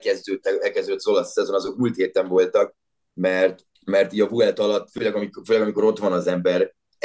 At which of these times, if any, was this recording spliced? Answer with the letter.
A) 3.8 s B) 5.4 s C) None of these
A